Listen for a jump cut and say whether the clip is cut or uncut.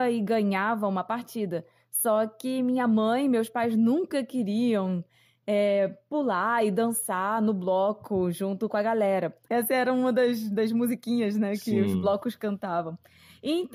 cut